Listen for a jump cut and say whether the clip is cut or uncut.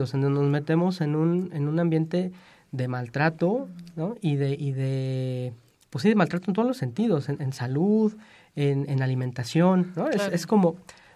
uncut